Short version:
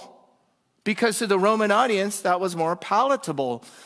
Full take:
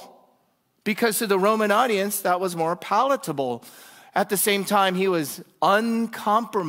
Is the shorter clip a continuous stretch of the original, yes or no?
yes